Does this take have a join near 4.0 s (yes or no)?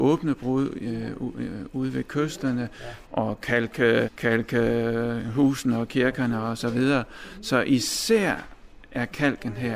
yes